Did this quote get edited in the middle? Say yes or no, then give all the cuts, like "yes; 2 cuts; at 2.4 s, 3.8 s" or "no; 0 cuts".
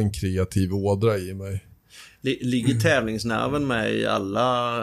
no; 0 cuts